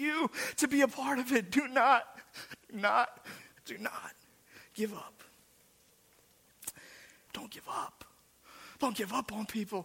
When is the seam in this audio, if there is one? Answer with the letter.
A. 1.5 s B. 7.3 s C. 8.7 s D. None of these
B